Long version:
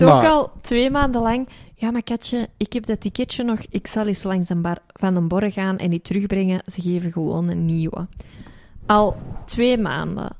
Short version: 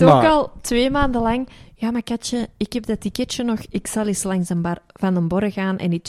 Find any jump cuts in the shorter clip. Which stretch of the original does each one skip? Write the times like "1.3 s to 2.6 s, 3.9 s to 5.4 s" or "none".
none